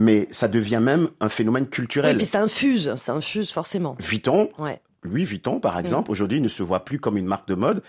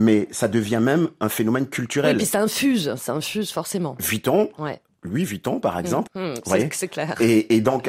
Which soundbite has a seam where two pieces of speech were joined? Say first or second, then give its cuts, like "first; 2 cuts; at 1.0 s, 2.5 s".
second; 1 cut; at 6.1 s